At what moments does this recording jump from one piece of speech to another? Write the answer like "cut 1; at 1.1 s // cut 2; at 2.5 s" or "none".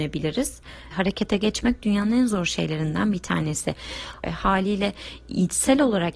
cut 1; at 0.9 s // cut 2; at 4.2 s